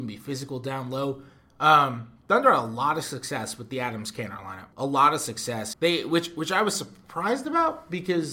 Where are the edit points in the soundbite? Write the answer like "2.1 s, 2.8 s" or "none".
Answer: 4.7 s, 5.7 s